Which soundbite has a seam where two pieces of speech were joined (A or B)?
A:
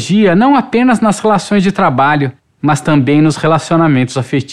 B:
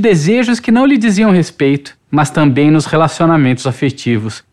B